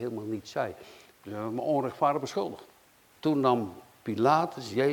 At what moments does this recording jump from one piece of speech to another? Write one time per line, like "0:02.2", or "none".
0:01.1
0:03.1